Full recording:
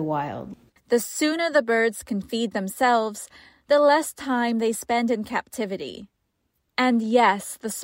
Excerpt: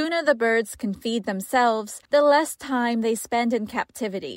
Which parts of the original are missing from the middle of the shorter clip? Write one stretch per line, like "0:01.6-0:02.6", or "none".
0:03.3-0:03.6